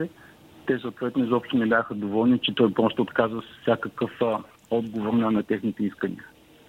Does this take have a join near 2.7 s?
no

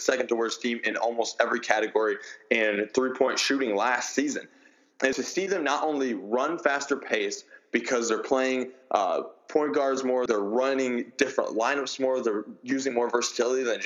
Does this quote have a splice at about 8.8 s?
no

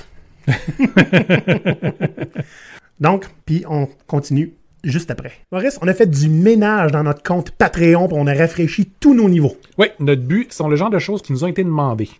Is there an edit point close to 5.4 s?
yes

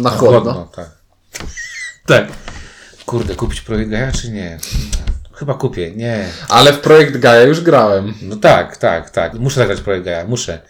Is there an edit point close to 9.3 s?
yes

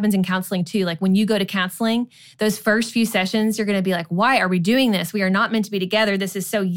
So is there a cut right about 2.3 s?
no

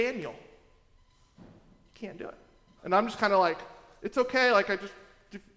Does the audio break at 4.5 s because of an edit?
no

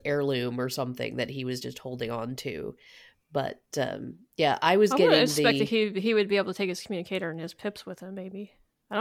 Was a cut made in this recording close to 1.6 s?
no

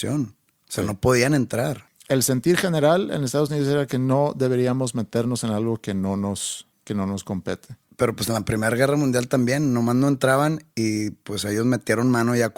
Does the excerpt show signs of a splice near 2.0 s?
no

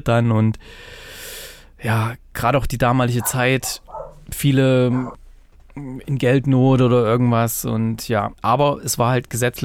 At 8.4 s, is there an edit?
yes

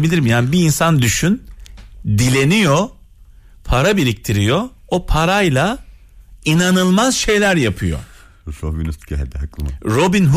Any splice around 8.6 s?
no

